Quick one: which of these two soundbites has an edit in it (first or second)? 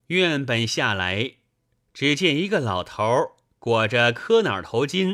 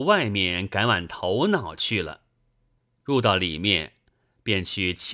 second